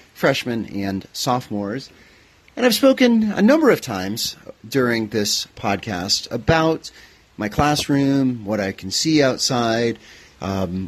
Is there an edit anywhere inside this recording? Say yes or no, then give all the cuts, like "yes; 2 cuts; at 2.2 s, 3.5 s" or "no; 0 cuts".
no; 0 cuts